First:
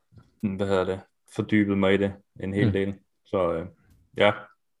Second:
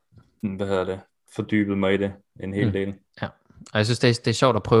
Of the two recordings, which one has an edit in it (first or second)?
second